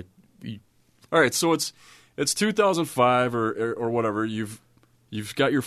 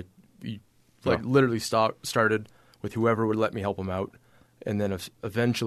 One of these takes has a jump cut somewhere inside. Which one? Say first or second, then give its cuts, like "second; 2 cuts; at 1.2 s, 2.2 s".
first; 1 cut; at 1.0 s